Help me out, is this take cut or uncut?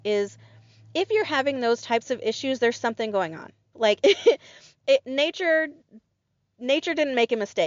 cut